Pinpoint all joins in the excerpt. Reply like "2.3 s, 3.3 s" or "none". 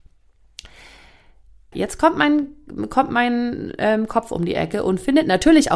1.7 s

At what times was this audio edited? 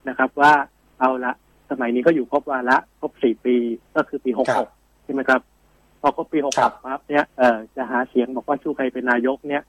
3.9 s, 7.3 s

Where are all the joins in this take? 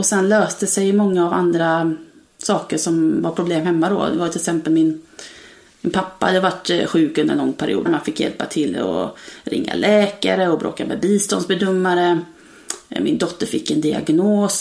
7.9 s

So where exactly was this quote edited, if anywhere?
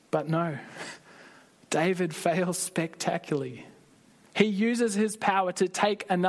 none

